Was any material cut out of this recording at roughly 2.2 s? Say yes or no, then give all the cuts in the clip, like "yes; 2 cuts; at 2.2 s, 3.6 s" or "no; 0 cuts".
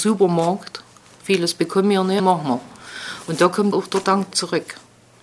yes; 2 cuts; at 2.2 s, 3.7 s